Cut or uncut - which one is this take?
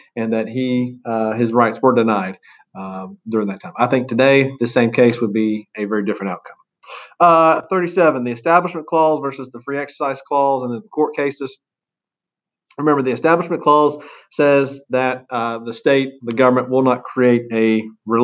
uncut